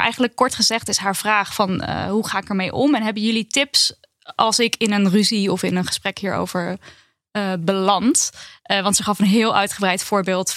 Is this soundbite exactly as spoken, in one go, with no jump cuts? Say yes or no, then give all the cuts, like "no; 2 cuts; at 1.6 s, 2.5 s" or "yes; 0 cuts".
yes; 0 cuts